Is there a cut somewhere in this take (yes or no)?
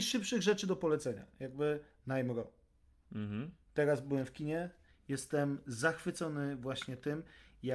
no